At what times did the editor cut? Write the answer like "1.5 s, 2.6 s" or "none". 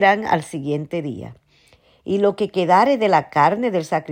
none